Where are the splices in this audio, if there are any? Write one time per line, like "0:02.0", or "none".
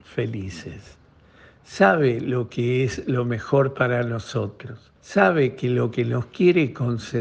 0:05.0